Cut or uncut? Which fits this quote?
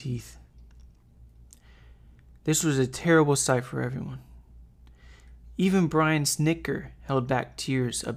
uncut